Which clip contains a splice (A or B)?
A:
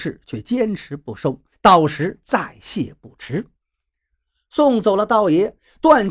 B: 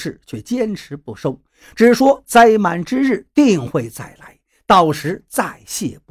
A